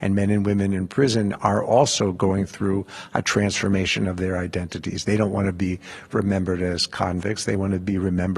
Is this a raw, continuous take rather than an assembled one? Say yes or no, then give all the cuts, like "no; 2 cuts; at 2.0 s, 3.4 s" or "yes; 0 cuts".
yes; 0 cuts